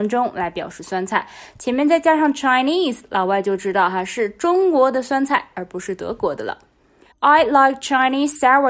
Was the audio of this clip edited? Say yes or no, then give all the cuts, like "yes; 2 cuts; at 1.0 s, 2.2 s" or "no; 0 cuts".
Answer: yes; 1 cut; at 7.1 s